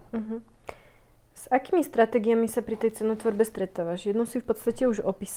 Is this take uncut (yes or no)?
yes